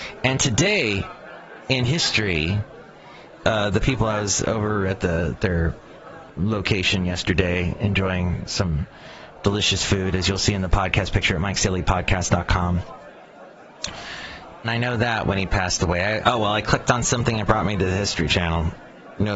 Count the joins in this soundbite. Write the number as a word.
three